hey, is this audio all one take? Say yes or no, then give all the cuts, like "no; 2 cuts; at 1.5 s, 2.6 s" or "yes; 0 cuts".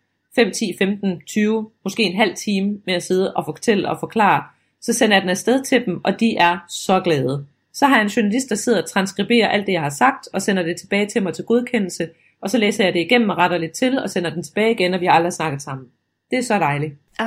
yes; 0 cuts